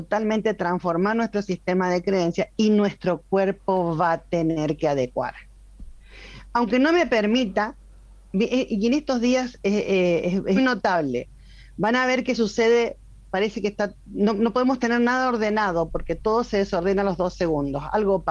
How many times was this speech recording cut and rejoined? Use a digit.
1